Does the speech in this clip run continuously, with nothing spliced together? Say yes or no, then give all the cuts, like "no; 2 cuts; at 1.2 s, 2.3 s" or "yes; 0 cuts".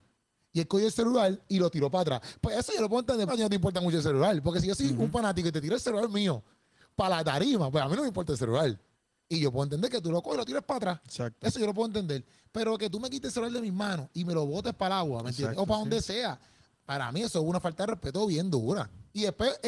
no; 1 cut; at 3.3 s